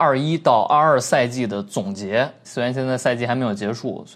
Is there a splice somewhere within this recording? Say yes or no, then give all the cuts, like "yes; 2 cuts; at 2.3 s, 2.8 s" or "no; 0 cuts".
yes; 1 cut; at 2.4 s